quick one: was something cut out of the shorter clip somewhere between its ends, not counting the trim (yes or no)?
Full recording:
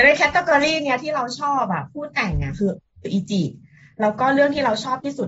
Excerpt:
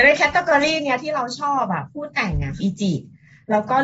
yes